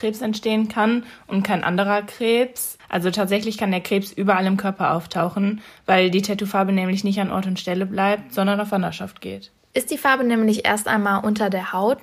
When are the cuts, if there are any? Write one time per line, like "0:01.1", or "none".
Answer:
0:02.8